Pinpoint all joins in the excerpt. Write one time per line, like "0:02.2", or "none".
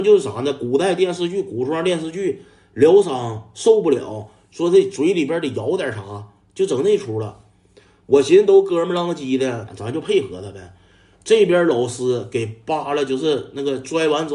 0:09.7